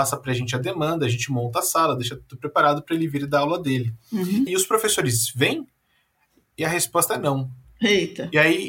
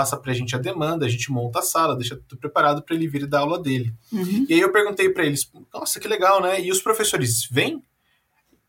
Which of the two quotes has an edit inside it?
first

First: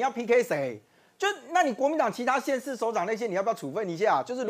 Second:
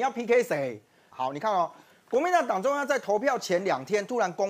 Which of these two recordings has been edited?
second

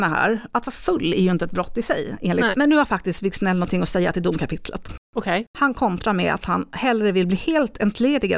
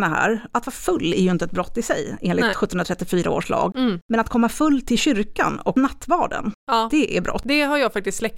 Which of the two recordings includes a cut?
first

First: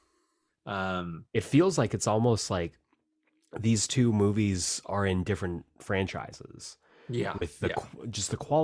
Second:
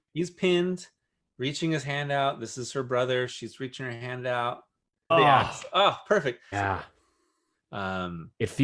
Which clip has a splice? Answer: second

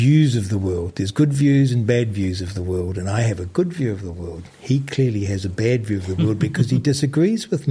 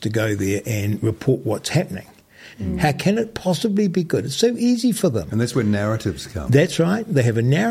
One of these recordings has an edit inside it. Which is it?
second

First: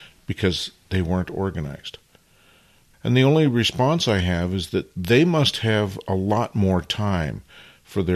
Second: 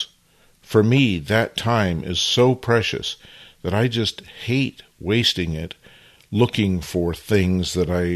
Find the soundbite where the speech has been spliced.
first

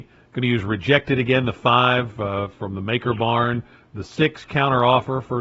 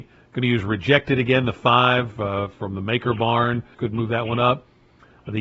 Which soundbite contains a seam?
second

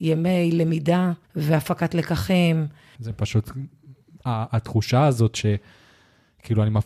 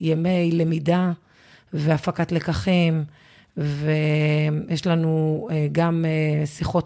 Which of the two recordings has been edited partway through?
first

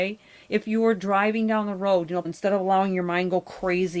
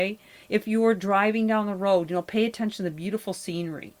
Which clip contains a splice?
first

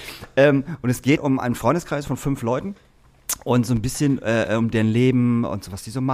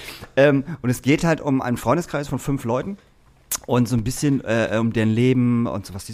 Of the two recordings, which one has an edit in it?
first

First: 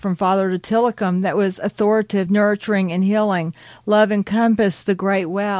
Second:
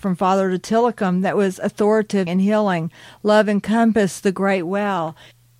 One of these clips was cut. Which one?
second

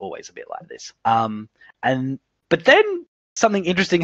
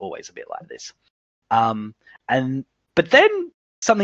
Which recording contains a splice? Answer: first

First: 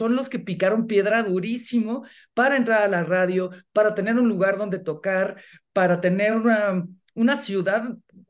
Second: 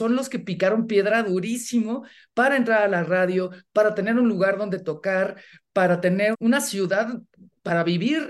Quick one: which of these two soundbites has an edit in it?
second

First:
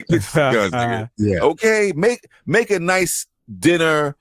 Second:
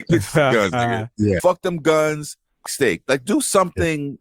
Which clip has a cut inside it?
second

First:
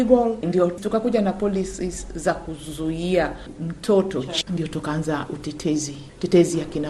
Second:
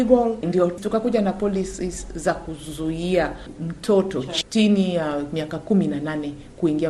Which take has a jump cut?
first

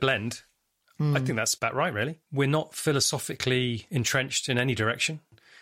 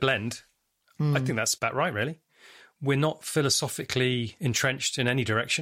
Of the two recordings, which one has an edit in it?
first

